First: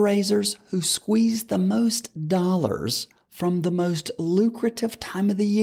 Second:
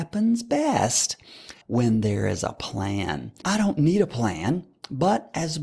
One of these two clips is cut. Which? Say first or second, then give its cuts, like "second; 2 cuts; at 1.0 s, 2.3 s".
second; 2 cuts; at 1.6 s, 3.4 s